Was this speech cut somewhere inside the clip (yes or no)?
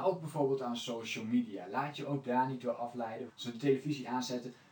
yes